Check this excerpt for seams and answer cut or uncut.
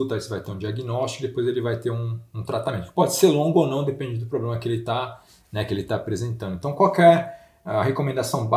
uncut